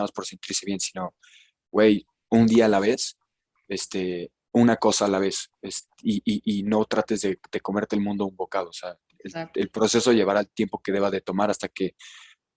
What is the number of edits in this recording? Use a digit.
0